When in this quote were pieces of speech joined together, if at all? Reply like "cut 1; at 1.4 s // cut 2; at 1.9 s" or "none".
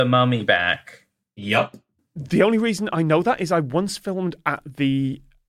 cut 1; at 2.0 s